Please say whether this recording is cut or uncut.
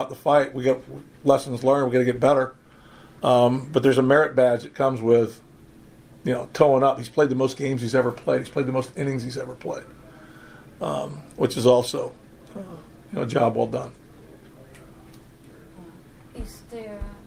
uncut